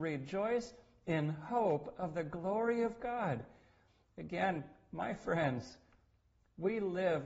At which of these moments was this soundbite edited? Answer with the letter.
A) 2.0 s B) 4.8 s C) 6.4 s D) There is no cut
D